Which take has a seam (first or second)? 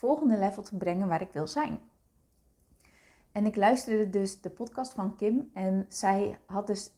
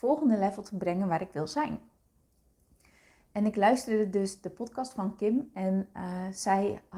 first